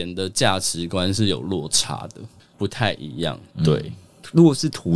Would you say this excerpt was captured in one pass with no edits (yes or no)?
no